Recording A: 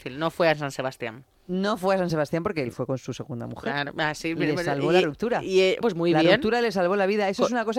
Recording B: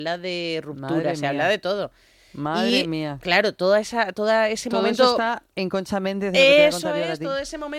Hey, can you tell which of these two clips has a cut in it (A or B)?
A